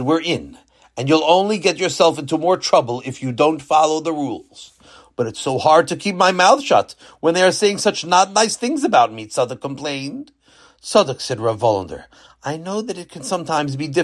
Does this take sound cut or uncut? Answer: uncut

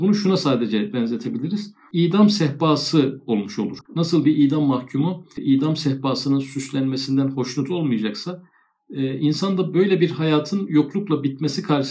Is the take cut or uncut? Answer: cut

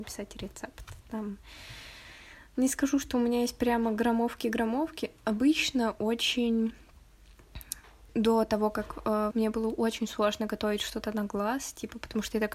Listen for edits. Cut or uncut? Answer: cut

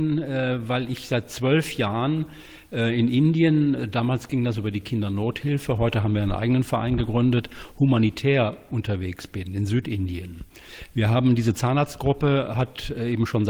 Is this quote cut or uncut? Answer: uncut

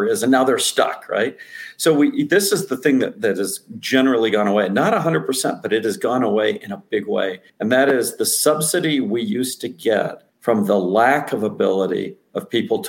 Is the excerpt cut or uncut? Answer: cut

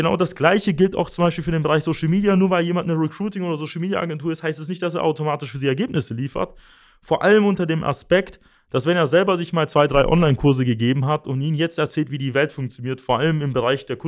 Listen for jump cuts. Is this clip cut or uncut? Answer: uncut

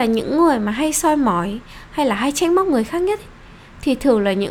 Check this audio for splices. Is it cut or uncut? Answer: uncut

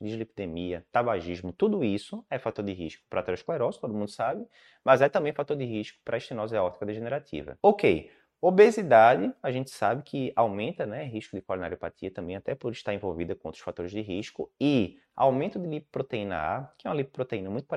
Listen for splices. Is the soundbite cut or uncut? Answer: uncut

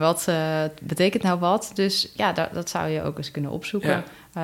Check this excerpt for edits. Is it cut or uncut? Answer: uncut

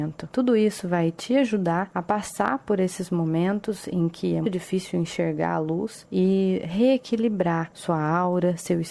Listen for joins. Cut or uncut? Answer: cut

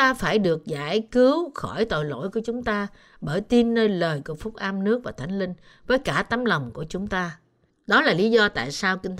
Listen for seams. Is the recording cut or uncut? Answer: cut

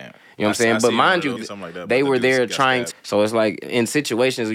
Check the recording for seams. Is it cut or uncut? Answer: cut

